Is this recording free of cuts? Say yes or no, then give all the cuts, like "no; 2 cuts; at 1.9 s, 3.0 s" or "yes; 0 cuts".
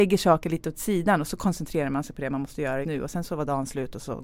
no; 1 cut; at 2.8 s